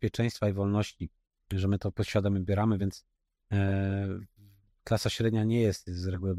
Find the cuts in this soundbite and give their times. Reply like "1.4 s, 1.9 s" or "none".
none